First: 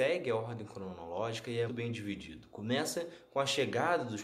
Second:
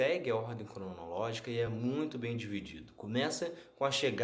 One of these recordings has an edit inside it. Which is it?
first; 1 cut; at 1.7 s

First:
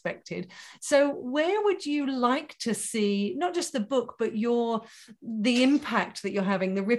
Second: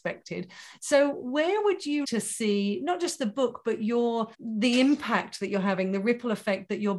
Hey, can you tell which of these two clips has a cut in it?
second; 2 cuts; at 2.0 s, 4.3 s

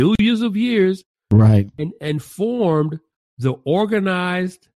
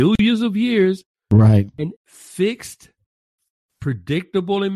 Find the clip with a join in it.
second; 1 cut; at 1.9 s

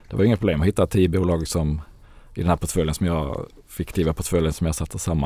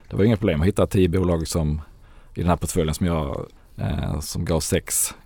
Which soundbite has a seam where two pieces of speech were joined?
second; 1 cut; at 3.6 s

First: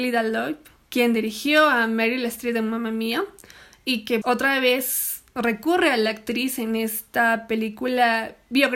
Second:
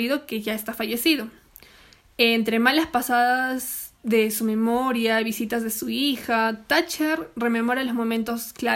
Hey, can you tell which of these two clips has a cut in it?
first; 1 cut; at 4.2 s

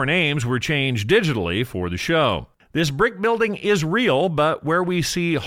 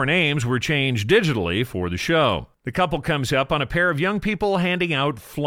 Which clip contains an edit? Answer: first; 1 cut; at 2.6 s

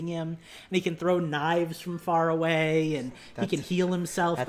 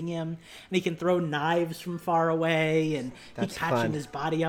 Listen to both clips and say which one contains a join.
second; 1 cut; at 3.5 s

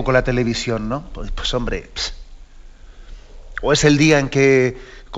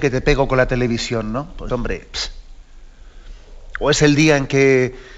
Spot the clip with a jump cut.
second; 1 cut; at 1.7 s

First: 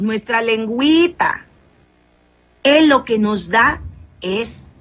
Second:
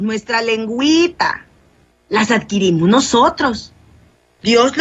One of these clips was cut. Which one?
second; 1 cut; at 1.9 s

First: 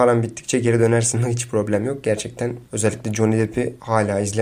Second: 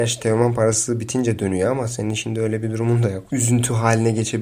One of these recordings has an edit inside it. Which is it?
second; 1 cut; at 3.3 s

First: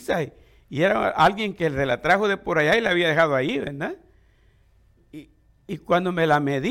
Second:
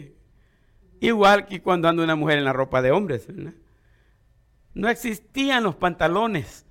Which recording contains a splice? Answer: second; 1 cut; at 4.7 s

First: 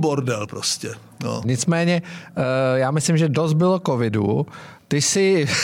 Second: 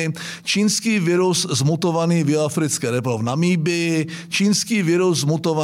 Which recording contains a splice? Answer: first; 1 cut; at 1.4 s

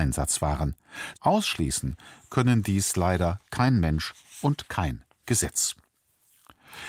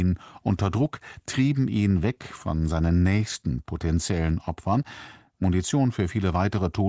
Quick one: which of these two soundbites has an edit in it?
first; 1 cut; at 1.1 s

